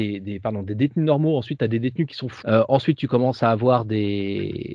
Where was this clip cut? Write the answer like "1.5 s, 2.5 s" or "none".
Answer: 2.4 s